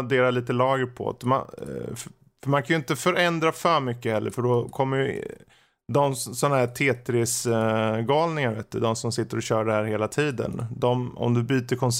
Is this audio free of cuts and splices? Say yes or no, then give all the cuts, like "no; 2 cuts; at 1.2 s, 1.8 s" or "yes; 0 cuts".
yes; 0 cuts